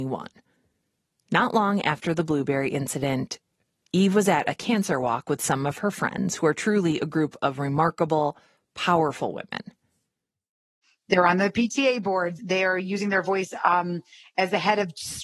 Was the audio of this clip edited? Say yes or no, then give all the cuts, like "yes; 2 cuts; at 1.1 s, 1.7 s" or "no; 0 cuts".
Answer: yes; 1 cut; at 12.4 s